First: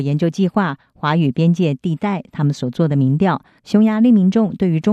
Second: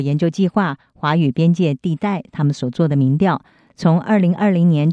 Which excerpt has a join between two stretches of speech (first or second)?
first